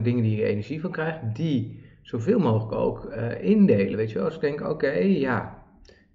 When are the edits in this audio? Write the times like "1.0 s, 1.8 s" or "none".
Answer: none

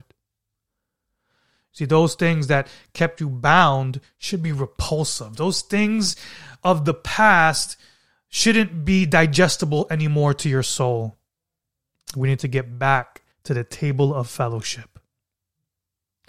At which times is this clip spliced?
12.0 s, 13.3 s

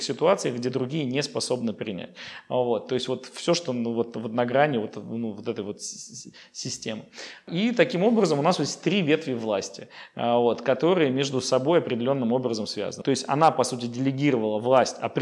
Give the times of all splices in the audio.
13.0 s

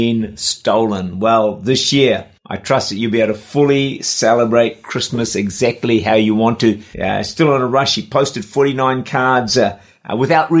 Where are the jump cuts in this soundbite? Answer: 2.4 s, 6.9 s

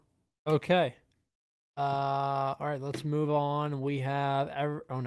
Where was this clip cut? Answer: none

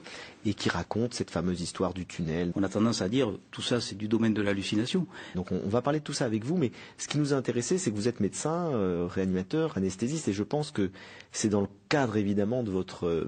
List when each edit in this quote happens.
2.5 s, 5.3 s

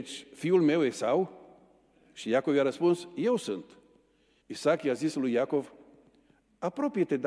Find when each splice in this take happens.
4.4 s

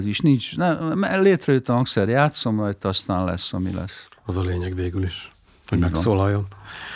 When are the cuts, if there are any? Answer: none

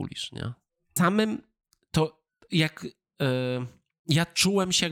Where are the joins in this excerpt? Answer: 1.0 s

